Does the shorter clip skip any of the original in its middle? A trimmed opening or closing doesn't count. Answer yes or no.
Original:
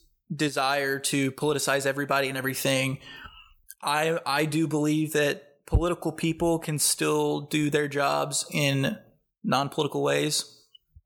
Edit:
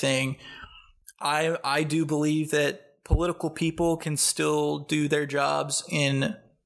no